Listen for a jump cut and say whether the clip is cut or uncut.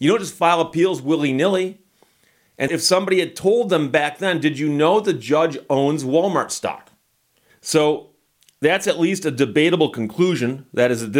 cut